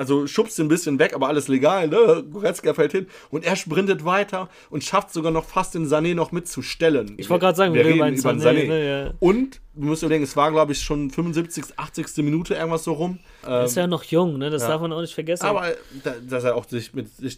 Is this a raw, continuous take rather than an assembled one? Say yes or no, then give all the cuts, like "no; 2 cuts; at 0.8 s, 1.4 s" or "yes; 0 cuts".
no; 2 cuts; at 7.2 s, 13.4 s